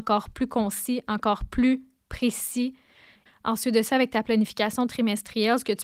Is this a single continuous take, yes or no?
no